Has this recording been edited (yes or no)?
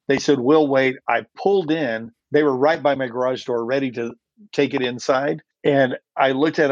yes